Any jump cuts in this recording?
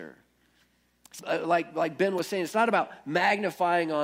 yes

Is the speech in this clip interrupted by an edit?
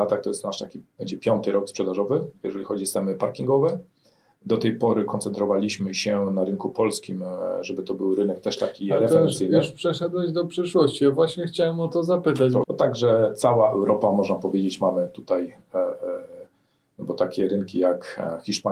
yes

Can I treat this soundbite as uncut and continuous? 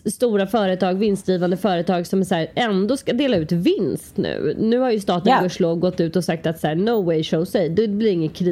yes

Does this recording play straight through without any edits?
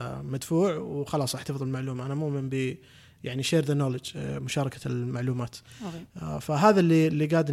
yes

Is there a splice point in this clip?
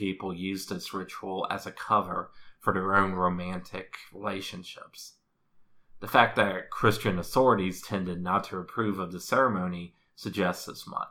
yes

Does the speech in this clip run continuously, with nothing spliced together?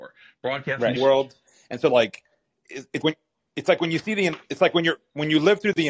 no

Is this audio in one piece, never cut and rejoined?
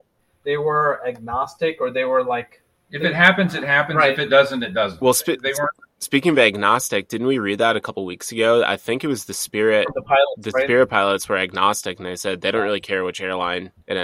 yes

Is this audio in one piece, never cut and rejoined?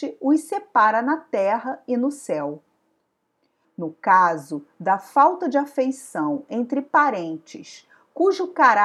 no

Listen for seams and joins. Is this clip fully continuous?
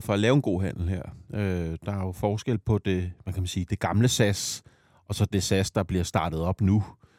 yes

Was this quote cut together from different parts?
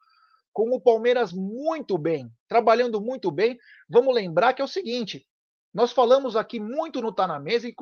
no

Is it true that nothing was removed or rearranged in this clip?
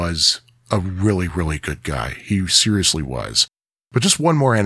yes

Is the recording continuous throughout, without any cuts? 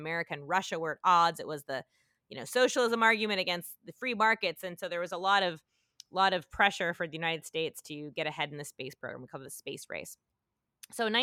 yes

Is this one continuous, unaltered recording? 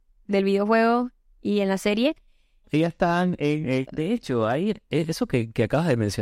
no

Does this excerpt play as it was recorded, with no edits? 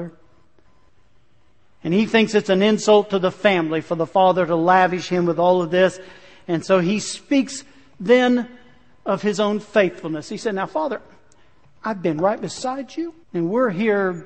no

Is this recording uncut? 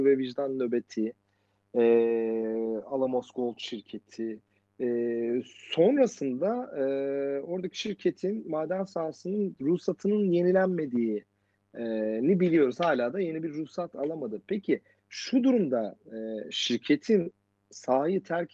yes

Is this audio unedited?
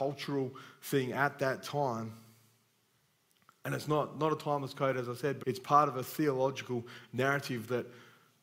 no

